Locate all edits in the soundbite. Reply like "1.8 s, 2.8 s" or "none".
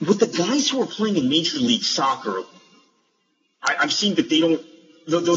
3.8 s